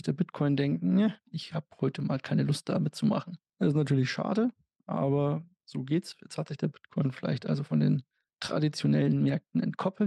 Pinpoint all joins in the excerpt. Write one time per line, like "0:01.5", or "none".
none